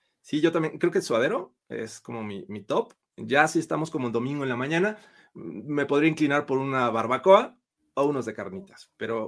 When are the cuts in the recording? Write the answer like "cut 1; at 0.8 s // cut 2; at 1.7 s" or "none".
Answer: none